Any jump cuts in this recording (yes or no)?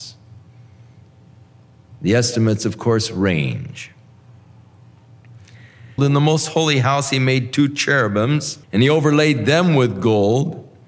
yes